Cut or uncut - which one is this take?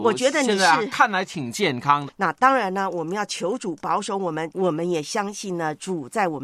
cut